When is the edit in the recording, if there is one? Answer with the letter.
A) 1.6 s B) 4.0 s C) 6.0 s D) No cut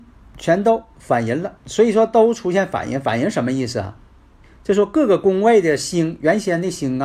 A